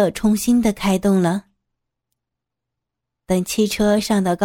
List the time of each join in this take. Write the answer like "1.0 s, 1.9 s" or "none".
3.2 s